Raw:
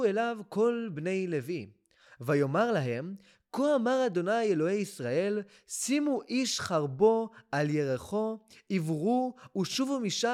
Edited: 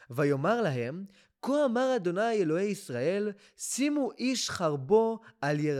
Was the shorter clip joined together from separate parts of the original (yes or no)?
no